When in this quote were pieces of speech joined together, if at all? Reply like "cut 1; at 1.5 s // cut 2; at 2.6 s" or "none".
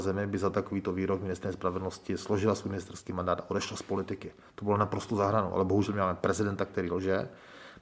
none